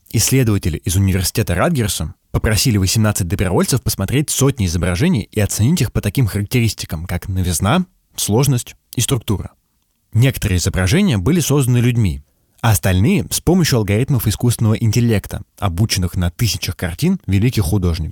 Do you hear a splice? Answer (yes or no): yes